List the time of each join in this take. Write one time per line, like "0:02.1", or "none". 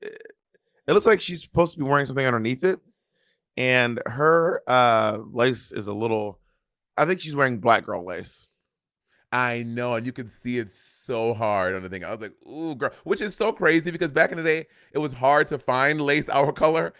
none